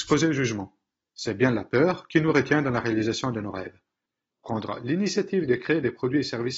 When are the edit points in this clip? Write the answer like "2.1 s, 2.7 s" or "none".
4.3 s